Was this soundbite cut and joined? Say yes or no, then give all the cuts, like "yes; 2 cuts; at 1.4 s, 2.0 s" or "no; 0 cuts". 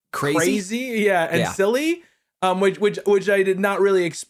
no; 0 cuts